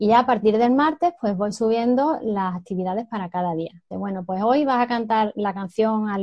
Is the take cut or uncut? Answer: cut